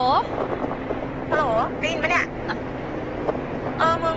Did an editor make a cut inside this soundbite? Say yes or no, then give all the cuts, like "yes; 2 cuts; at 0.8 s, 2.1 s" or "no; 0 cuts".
yes; 1 cut; at 2.5 s